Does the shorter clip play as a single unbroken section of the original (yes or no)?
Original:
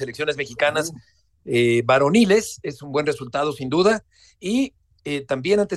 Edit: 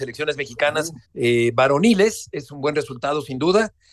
no